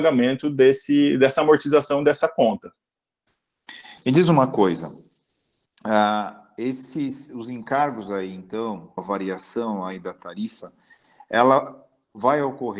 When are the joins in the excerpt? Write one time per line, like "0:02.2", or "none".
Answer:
0:04.0
0:09.0